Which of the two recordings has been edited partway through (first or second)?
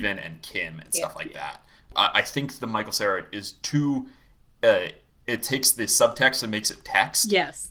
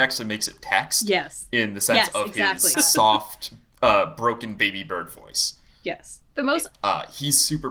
second